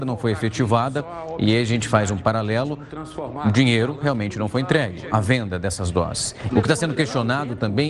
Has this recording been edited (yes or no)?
yes